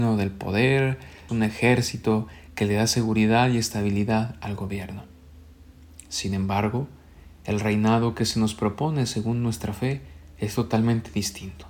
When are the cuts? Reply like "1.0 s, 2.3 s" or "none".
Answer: 1.3 s